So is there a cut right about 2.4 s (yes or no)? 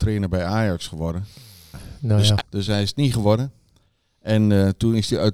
yes